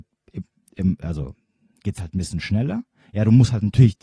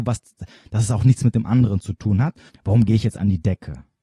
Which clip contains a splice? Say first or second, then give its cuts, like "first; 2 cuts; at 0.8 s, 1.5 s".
second; 1 cut; at 2.5 s